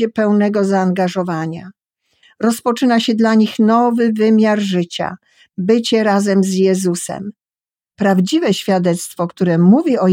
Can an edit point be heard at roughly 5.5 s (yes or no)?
no